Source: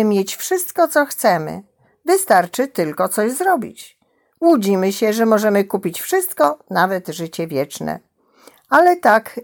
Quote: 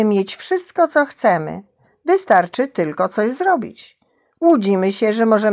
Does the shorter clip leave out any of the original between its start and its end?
no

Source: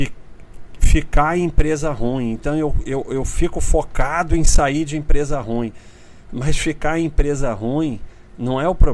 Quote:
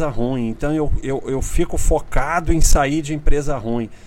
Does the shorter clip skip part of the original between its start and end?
no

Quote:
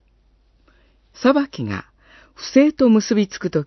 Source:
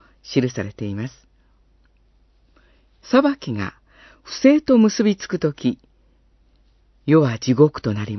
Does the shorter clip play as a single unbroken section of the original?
yes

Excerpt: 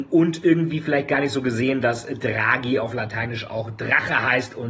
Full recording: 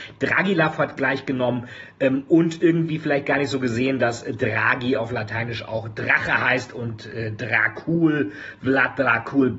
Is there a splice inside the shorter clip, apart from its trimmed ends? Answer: no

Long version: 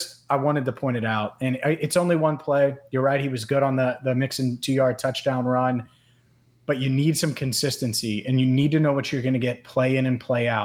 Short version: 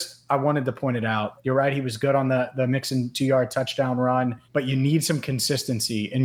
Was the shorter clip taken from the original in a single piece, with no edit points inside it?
no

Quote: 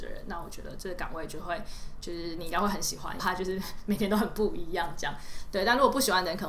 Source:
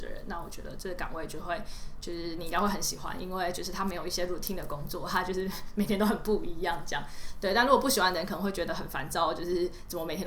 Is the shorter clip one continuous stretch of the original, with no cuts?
no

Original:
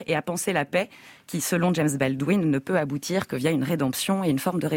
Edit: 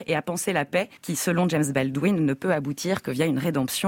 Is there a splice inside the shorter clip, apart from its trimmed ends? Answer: yes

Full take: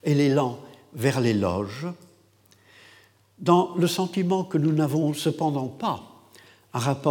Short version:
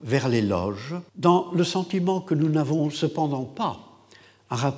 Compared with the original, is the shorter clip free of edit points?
no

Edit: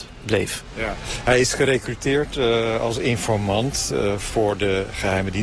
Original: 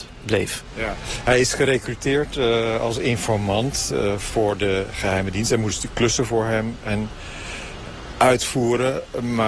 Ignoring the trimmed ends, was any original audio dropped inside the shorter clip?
no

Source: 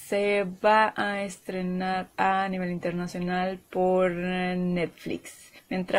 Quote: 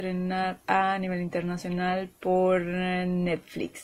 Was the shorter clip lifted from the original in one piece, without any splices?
yes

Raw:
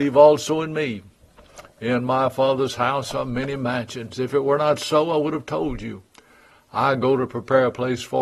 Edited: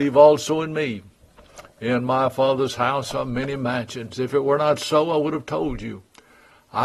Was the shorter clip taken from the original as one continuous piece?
yes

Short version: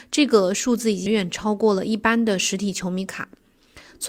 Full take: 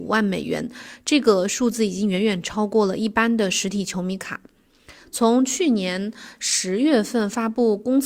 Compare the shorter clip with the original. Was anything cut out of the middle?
yes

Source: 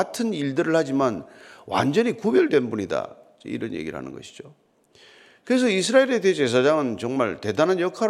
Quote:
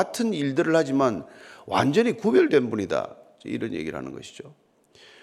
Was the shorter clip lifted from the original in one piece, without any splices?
yes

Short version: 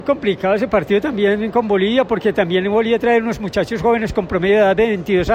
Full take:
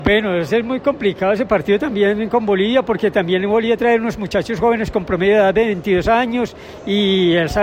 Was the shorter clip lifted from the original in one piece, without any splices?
yes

